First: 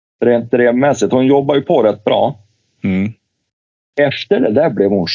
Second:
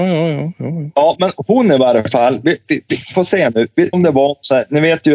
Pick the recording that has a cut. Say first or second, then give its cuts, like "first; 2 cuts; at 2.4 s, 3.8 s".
second; 2 cuts; at 2.6 s, 3.9 s